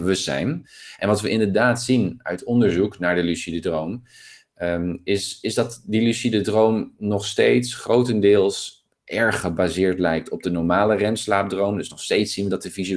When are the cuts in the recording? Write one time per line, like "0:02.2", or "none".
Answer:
none